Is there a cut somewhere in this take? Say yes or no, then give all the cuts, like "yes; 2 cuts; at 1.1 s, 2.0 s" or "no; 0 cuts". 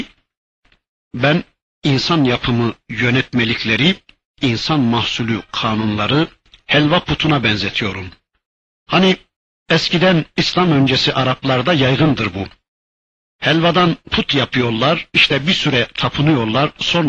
no; 0 cuts